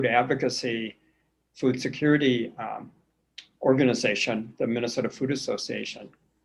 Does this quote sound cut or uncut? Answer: uncut